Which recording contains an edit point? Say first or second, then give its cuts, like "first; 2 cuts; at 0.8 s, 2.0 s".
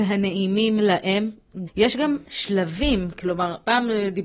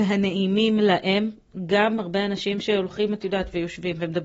first; 1 cut; at 1.7 s